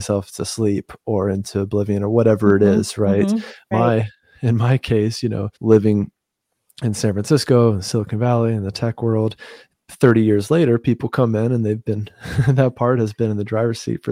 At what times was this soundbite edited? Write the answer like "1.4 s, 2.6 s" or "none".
3.7 s, 5.5 s